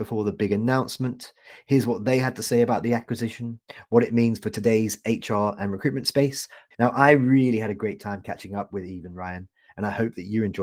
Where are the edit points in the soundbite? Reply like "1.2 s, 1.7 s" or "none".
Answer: 6.7 s